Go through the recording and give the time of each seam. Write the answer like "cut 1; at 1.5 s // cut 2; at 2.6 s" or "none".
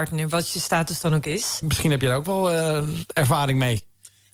cut 1; at 1.6 s